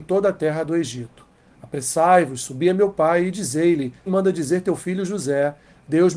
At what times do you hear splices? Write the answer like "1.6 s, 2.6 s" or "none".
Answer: 4.1 s

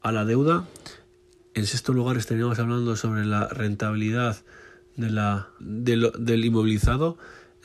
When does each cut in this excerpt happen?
5.6 s

